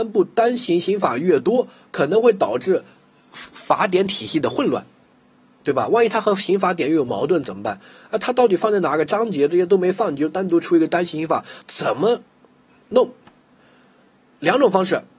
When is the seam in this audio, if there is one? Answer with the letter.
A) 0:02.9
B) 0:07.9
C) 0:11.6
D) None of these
C